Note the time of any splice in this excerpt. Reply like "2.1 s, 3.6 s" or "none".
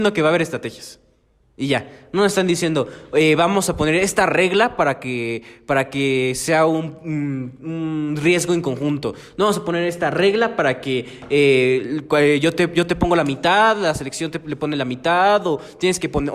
none